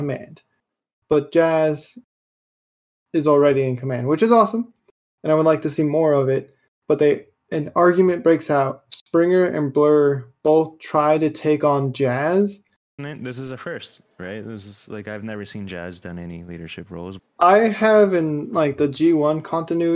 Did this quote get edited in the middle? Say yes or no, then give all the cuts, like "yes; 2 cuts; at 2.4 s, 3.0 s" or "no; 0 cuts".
yes; 2 cuts; at 13.0 s, 17.2 s